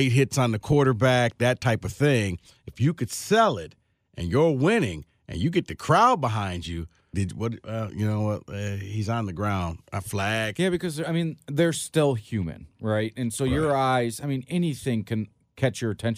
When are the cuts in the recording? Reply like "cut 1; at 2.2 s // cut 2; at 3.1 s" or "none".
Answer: cut 1; at 7.1 s